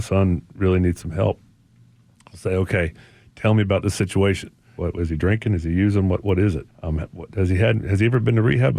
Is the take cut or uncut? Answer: cut